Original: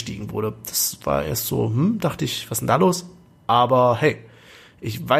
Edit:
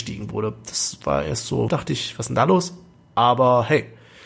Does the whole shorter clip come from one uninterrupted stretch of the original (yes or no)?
no